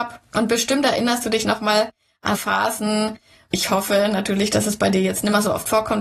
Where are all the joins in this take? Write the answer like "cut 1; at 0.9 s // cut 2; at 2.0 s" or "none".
cut 1; at 2.3 s